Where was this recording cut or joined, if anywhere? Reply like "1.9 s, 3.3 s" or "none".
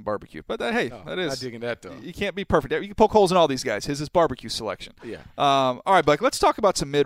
none